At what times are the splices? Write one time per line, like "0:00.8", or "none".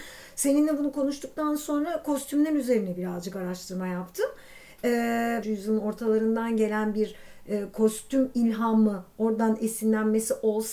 0:05.4